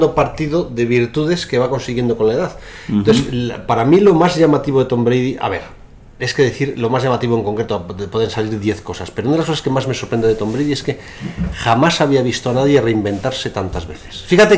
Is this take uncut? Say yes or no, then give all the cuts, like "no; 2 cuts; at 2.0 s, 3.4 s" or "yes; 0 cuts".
yes; 0 cuts